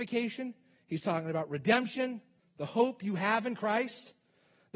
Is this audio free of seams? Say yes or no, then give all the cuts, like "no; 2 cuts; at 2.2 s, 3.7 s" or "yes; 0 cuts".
no; 1 cut; at 2.4 s